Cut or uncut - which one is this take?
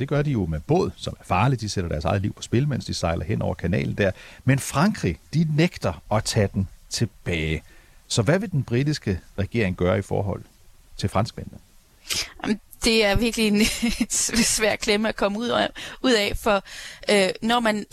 uncut